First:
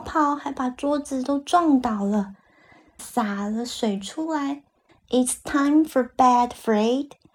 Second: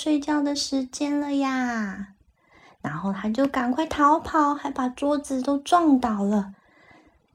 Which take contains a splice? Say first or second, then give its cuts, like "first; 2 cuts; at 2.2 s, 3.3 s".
first; 2 cuts; at 3.0 s, 4.9 s